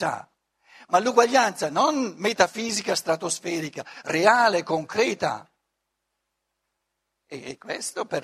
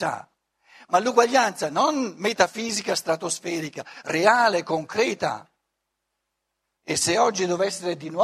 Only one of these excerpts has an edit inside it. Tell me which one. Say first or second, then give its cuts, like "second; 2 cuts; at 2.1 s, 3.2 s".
second; 1 cut; at 6.8 s